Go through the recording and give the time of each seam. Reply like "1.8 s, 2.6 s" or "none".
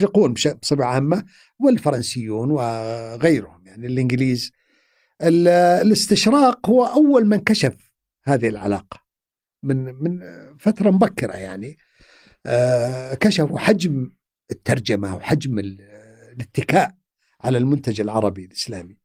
none

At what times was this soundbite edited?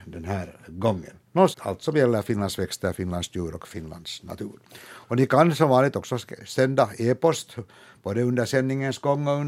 1.5 s

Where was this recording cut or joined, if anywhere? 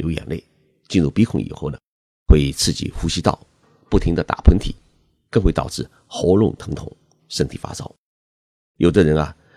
7.2 s

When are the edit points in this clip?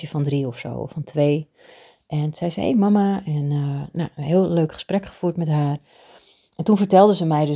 none

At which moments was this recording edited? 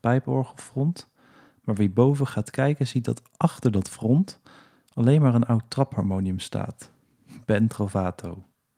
none

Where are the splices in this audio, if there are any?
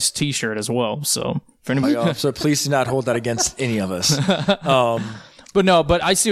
1.8 s

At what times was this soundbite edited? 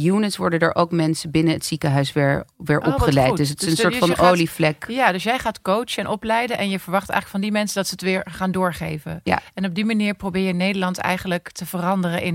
none

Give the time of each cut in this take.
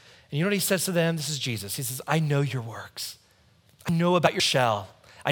none

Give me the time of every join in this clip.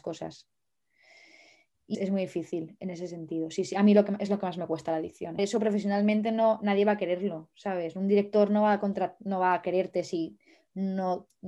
1.9 s, 5.4 s

